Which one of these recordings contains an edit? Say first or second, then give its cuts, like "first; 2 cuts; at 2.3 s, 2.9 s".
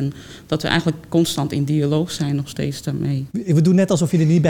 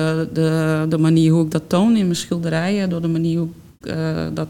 first; 1 cut; at 3.3 s